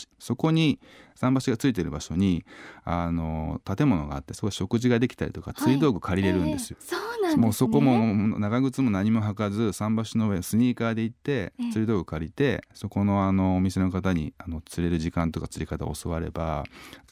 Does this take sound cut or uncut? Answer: cut